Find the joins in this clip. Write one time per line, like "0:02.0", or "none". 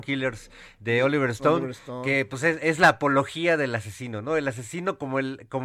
none